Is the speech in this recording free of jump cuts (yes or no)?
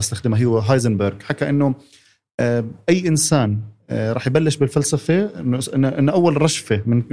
yes